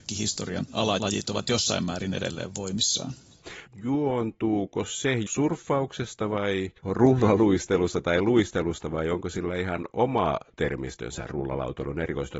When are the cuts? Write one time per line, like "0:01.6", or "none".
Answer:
0:03.7
0:06.8